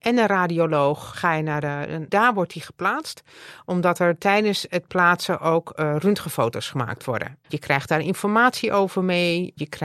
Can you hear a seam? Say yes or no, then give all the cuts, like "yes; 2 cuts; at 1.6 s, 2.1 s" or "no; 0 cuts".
yes; 2 cuts; at 2.1 s, 7.4 s